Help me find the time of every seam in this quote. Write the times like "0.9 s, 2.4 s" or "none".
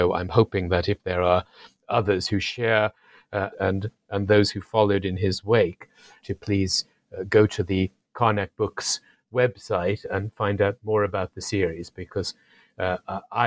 3.5 s, 6.2 s, 10.0 s